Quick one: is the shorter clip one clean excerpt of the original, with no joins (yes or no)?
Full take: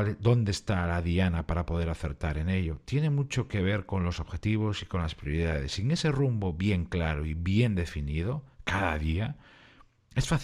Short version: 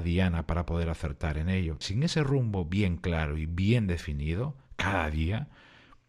no